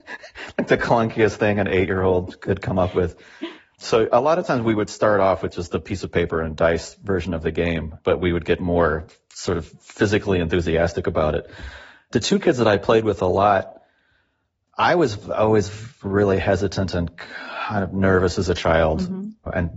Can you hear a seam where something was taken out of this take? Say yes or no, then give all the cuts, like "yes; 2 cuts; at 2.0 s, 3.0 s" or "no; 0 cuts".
no; 0 cuts